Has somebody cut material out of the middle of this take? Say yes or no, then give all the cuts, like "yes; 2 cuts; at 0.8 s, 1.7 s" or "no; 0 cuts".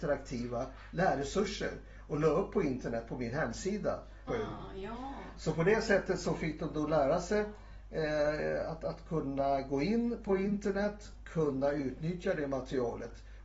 yes; 1 cut; at 4.3 s